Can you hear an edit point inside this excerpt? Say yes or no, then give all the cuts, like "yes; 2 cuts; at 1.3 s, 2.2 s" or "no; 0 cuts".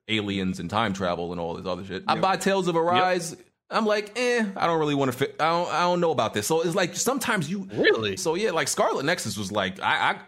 yes; 2 cuts; at 2.1 s, 8.2 s